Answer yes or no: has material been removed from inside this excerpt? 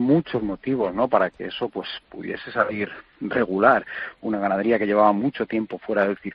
no